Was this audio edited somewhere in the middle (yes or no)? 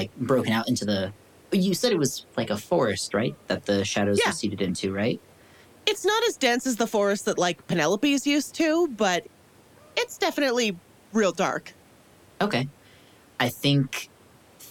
no